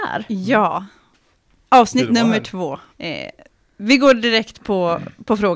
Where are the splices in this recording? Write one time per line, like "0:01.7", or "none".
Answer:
0:02.9